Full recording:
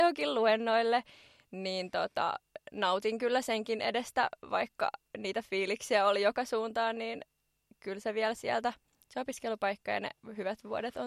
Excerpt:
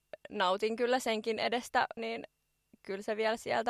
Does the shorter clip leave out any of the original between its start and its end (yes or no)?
yes